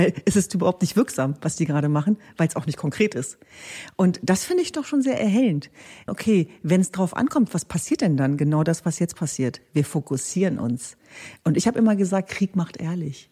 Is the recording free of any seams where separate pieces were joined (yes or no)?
no